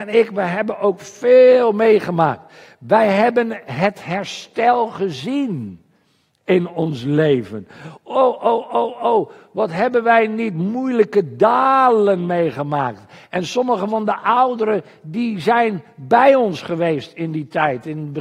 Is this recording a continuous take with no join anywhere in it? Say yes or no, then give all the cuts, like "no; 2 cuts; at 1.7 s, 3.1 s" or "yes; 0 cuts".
yes; 0 cuts